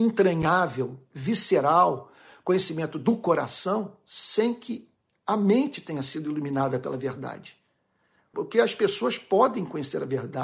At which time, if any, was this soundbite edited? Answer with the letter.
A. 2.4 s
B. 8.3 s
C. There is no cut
B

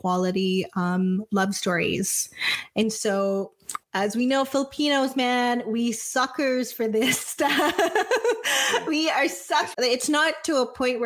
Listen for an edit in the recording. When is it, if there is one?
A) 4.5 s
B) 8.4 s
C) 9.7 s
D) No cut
C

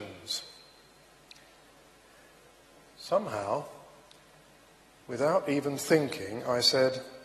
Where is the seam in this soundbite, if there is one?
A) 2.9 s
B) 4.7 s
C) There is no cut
C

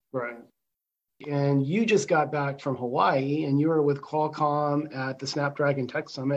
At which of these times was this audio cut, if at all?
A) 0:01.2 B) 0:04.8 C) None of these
A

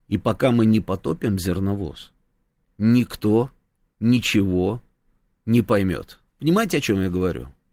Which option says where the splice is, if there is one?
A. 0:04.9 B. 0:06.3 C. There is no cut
B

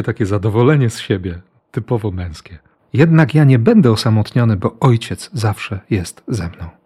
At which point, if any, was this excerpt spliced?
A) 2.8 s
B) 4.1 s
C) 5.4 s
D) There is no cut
A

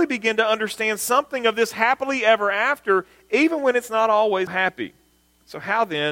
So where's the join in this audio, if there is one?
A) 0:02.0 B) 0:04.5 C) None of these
B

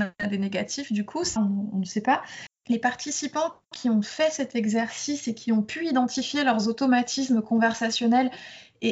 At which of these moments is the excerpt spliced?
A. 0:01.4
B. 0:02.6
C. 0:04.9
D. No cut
A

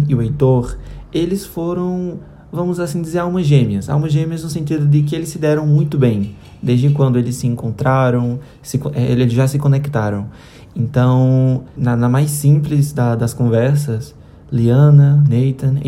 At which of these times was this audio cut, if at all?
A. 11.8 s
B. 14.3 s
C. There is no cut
A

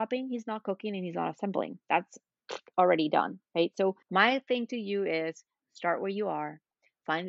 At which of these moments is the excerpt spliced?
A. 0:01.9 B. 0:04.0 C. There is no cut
B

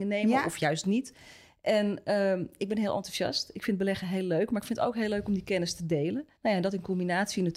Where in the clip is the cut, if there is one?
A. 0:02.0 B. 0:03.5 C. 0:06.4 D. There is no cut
C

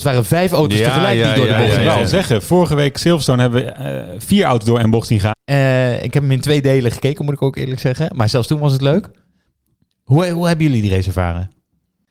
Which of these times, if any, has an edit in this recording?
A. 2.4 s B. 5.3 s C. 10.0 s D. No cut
B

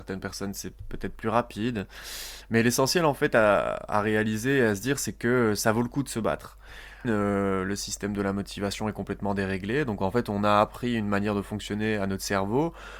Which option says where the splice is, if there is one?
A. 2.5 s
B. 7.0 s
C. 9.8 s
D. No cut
B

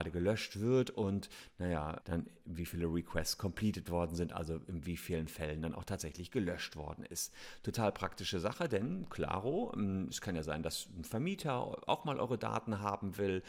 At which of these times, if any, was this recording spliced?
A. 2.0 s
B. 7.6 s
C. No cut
A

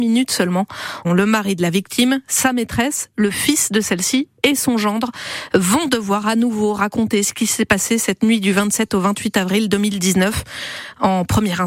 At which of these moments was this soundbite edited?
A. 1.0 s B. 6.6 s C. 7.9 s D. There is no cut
A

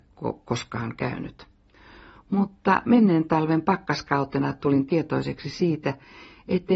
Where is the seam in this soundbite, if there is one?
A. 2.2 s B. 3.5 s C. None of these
A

